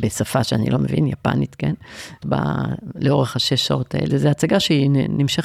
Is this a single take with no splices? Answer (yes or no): no